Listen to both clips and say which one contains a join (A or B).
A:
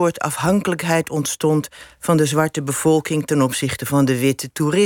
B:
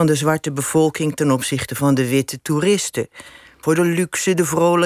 B